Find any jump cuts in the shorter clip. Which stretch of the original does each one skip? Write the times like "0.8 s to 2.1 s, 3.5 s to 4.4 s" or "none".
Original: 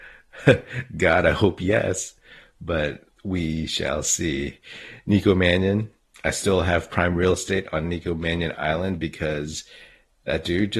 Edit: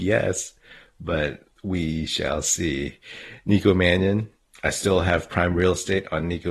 none